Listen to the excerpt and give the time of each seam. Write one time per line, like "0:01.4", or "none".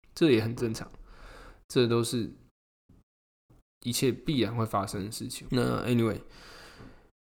0:05.5

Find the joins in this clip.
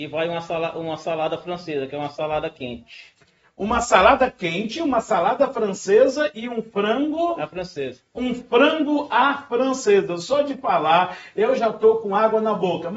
none

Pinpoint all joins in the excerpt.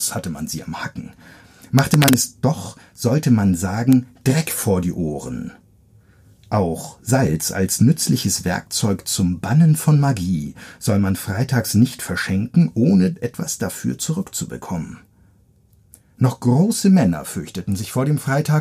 none

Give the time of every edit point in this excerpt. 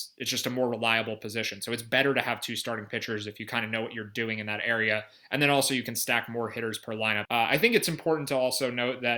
0:07.2

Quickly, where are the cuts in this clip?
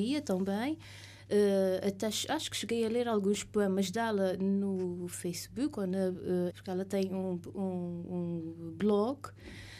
0:06.5

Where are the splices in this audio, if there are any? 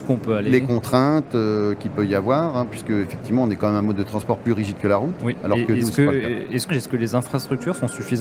0:05.4
0:06.7

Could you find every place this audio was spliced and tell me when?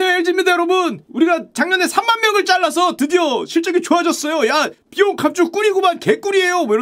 none

